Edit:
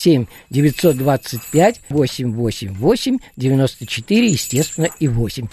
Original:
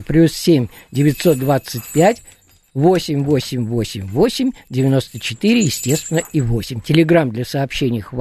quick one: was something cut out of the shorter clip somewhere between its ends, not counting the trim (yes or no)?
yes